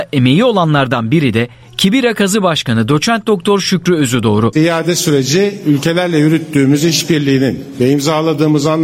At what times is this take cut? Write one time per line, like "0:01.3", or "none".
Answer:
0:04.5